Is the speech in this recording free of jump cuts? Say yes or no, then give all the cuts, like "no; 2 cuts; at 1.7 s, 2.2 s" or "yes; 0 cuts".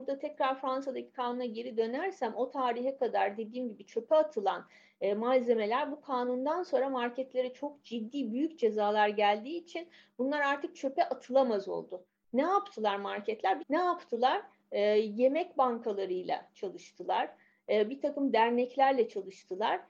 no; 1 cut; at 13.6 s